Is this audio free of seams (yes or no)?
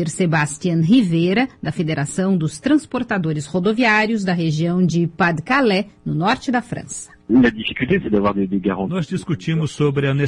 yes